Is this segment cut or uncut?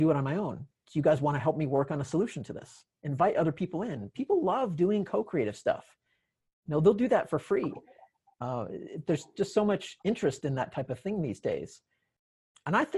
uncut